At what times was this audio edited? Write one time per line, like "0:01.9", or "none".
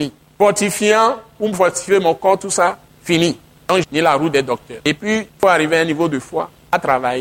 0:03.8
0:05.3